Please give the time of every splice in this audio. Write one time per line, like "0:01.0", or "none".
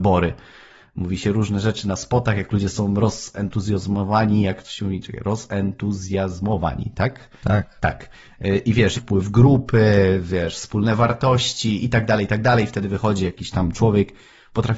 0:07.8
0:08.9